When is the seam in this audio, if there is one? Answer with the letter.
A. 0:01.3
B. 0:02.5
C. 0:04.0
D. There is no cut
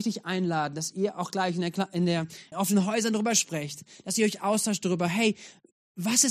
B